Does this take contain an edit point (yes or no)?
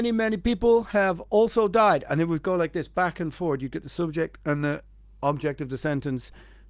no